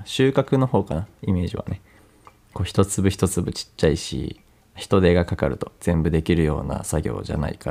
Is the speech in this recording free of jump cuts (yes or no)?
no